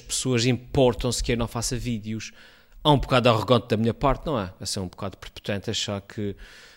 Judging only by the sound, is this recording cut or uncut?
uncut